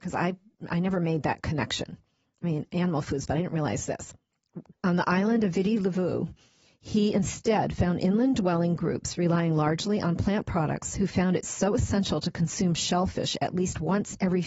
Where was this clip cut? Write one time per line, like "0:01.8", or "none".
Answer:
0:04.7